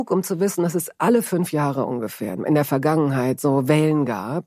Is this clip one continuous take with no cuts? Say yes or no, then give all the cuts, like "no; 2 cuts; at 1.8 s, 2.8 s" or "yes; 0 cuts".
yes; 0 cuts